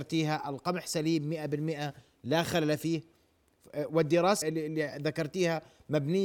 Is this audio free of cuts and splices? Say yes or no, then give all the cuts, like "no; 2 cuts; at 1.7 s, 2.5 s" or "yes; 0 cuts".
no; 1 cut; at 4.4 s